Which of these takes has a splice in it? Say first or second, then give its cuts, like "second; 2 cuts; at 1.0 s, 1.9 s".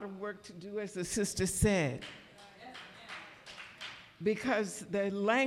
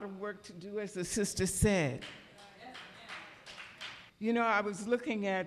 second; 1 cut; at 4.1 s